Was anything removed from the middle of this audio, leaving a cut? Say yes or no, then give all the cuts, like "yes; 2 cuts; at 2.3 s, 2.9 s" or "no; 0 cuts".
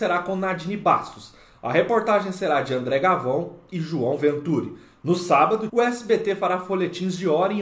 yes; 1 cut; at 5.7 s